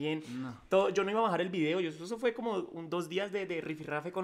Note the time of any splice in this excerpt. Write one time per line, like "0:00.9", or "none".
none